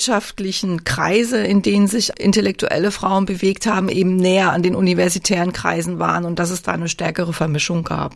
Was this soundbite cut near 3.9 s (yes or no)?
no